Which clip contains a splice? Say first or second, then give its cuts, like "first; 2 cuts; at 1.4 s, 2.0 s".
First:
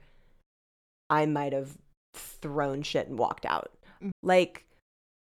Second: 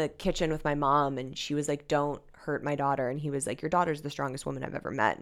first; 1 cut; at 4.1 s